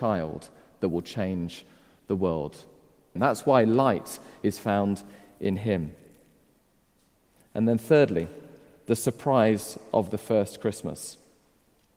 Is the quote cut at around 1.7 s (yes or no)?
no